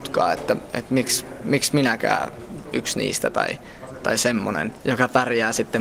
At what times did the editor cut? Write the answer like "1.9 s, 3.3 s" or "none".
2.6 s, 4.8 s